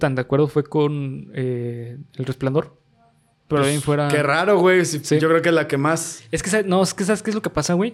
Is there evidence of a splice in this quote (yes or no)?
no